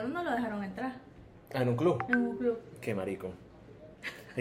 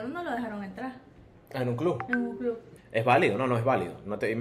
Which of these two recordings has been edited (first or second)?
second